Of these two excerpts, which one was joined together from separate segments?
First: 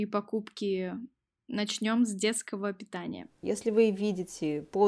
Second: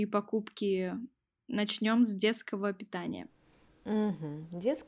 first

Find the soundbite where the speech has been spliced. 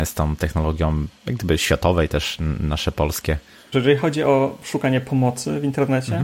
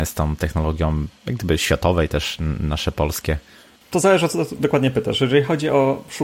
first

